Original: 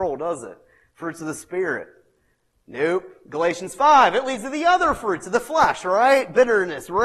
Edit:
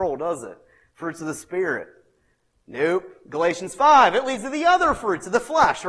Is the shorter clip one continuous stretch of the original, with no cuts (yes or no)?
yes